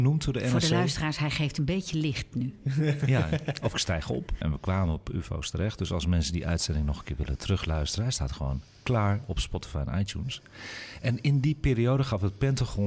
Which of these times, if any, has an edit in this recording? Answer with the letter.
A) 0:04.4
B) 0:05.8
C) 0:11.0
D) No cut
A